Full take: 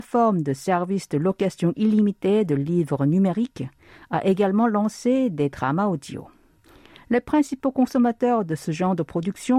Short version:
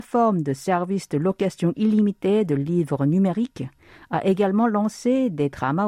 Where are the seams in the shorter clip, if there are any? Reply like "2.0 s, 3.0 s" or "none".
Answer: none